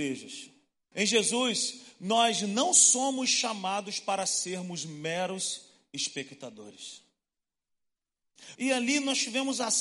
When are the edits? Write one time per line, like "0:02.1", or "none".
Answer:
0:00.9
0:08.5